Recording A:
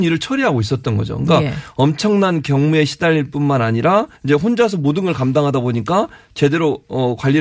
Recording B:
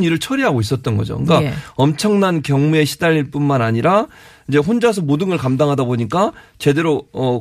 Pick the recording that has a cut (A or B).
A